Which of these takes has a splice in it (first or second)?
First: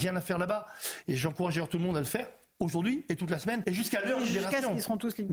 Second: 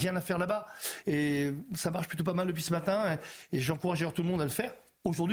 first